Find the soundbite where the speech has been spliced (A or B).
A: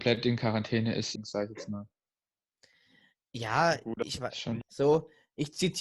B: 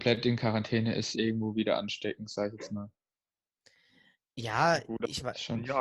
A